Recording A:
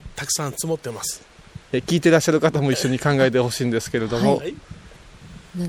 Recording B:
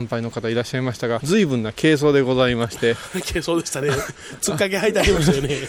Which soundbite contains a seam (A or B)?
B